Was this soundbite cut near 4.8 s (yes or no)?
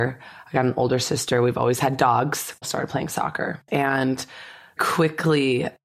yes